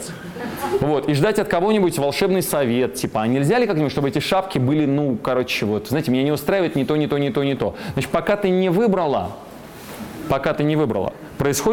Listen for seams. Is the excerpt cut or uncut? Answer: uncut